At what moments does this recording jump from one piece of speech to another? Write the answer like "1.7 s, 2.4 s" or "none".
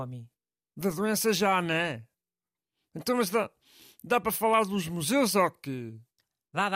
none